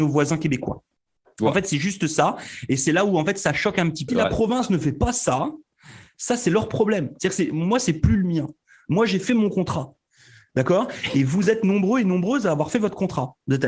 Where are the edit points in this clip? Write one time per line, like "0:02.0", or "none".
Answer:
0:04.1